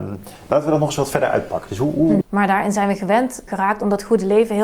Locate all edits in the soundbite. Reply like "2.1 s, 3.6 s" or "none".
2.2 s, 3.5 s